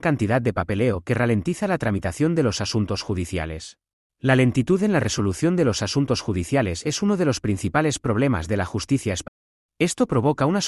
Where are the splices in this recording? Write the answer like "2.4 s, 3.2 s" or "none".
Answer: 4.0 s, 9.7 s